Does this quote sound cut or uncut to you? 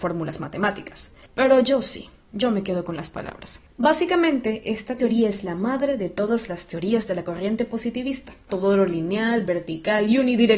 cut